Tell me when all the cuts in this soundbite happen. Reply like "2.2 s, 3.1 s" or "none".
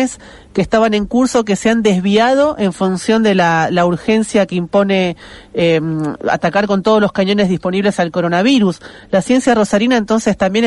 none